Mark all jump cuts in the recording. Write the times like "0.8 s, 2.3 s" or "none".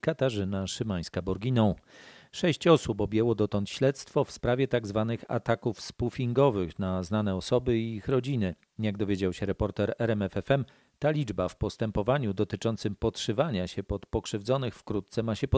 none